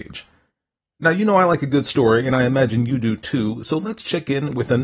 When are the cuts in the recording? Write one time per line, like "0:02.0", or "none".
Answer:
none

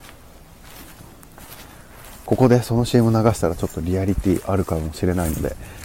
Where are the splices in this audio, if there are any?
0:02.3

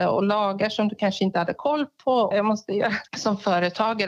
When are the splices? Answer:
0:02.3

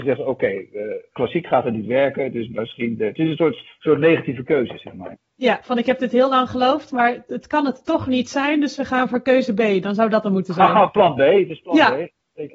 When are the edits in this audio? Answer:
none

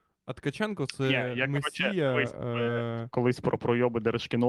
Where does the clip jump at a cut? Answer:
0:03.1

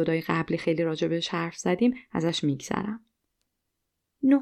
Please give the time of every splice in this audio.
none

